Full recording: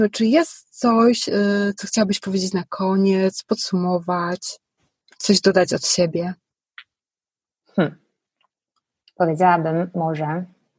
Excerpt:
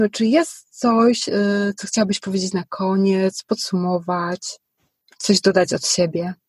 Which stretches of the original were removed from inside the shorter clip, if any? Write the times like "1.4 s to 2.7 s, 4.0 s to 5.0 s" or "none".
none

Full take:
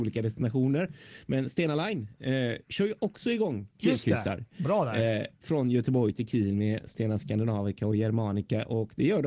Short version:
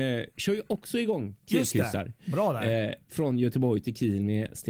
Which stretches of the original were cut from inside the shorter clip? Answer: none

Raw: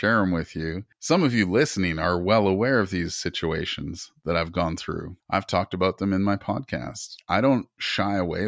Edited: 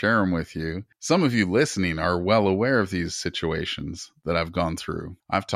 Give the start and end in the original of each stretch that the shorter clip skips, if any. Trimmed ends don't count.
none

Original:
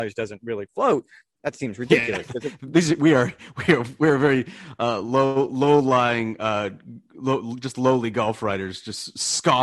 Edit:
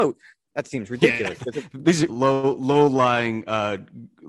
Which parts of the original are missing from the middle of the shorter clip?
3.0 s to 5.0 s

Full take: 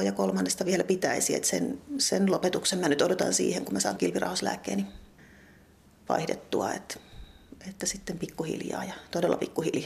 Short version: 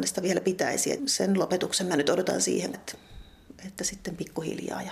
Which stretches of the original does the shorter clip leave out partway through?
1.4 s to 1.9 s, 3.7 s to 6.8 s

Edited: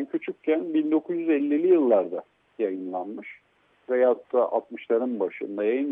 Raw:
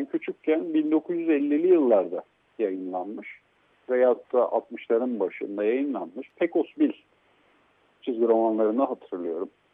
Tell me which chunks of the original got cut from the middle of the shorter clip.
none

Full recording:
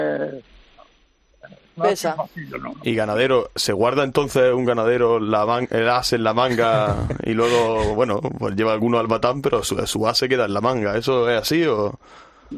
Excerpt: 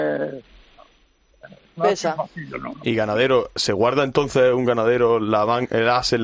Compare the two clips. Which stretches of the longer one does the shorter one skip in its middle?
none

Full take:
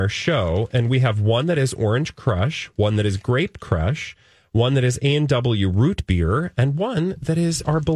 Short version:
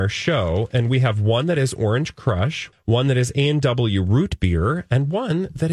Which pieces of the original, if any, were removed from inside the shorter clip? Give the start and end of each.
2.7 s to 4.4 s

